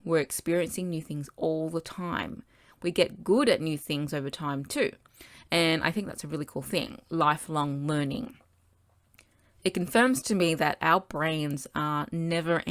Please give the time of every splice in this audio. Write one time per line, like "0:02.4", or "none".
none